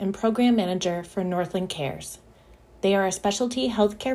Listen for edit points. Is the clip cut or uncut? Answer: uncut